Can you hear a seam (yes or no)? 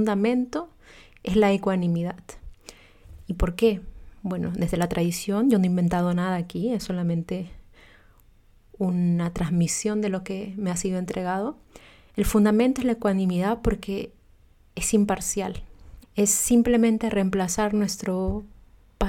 yes